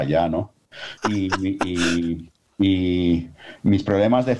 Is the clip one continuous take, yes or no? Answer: no